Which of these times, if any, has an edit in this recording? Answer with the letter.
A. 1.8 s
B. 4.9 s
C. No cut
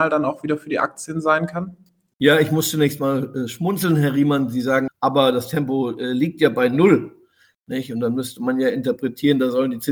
B